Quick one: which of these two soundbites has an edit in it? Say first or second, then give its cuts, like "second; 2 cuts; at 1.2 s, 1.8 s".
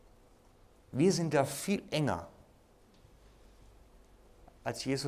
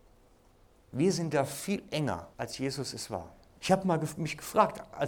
second; 2 cuts; at 2.3 s, 3.6 s